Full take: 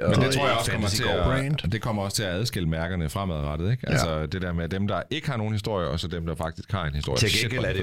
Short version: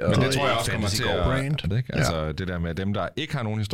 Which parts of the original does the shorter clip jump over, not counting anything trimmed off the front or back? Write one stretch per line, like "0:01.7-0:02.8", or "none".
0:01.7-0:03.6